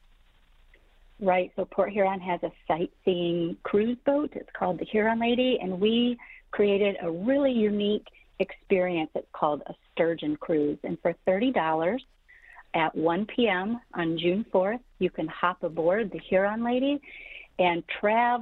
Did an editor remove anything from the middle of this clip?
no; 0 cuts

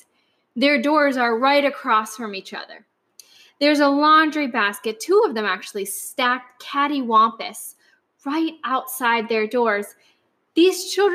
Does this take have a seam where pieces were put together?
no; 0 cuts

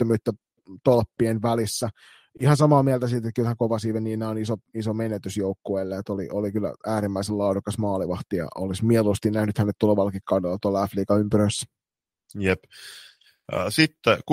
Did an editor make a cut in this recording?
no; 0 cuts

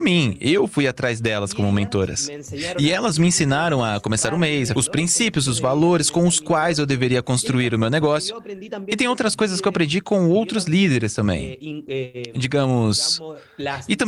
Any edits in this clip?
yes; 1 cut; at 4.7 s

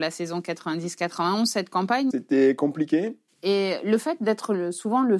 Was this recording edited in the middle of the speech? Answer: yes; 2 cuts; at 2.1 s, 3.3 s

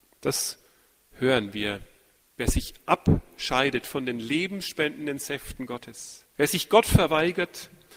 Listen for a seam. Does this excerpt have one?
no; 0 cuts

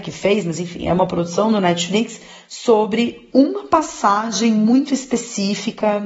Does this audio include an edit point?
no; 0 cuts

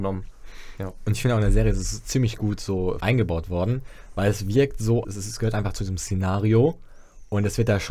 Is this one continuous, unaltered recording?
no; 2 cuts; at 3.0 s, 5.0 s

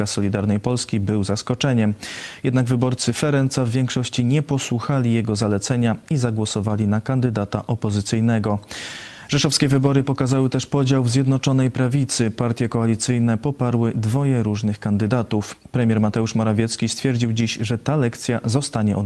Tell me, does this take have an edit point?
no; 0 cuts

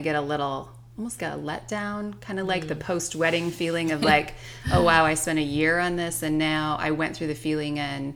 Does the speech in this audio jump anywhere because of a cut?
yes; 1 cut; at 1.2 s

